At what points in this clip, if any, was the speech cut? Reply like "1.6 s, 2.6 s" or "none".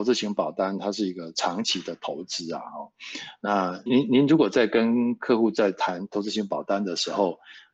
3.9 s